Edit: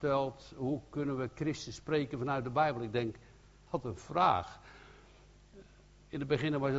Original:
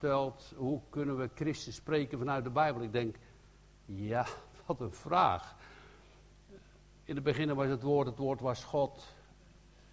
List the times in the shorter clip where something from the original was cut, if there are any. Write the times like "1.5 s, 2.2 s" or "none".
3.7 s